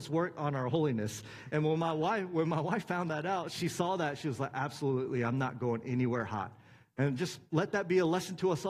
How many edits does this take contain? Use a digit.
0